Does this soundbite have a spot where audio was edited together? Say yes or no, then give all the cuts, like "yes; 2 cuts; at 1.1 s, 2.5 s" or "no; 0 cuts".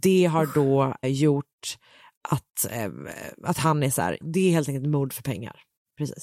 yes; 2 cuts; at 1.0 s, 4.2 s